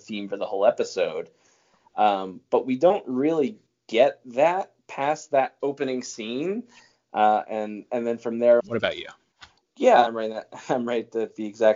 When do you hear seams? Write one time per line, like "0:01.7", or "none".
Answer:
0:08.6
0:10.1